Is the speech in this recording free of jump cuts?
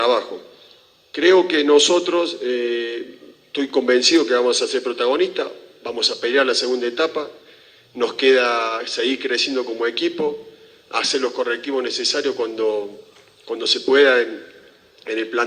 yes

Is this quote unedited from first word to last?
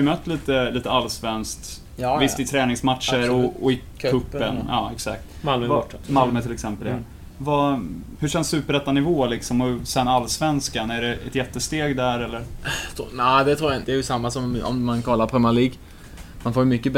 no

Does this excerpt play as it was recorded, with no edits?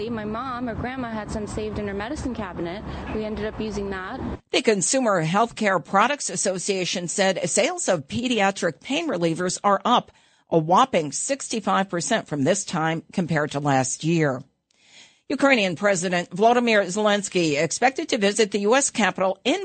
yes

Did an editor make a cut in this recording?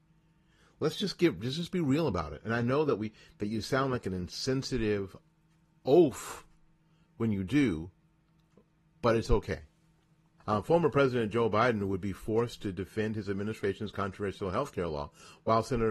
yes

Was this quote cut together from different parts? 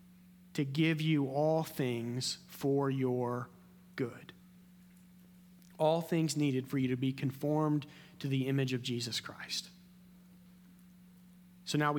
no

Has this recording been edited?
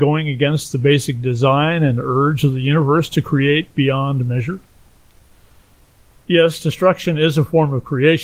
no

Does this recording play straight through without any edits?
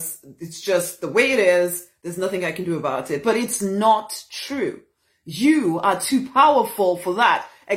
yes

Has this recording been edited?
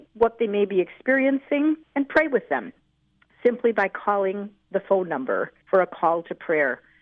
yes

